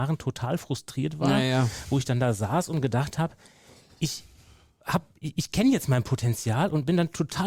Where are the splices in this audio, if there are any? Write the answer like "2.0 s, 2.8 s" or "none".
none